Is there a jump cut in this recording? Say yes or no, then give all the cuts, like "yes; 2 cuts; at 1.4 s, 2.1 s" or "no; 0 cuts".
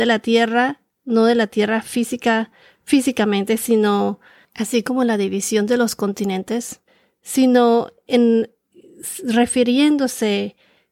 no; 0 cuts